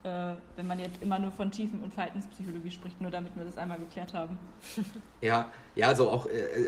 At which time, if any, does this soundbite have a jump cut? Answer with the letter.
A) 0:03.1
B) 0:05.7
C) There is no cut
C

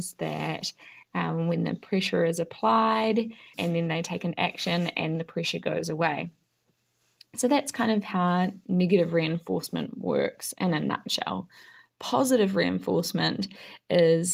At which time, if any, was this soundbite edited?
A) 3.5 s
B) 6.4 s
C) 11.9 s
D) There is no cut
A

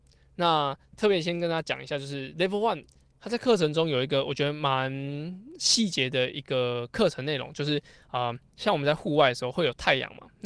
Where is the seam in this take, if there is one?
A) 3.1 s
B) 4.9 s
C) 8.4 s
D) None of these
A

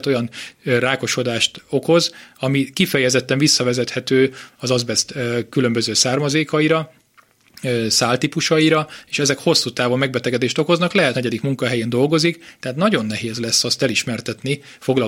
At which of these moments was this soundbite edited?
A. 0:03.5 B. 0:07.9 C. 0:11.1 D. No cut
C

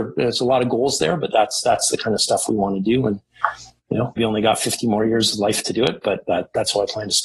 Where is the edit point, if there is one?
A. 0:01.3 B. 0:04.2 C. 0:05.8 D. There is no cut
B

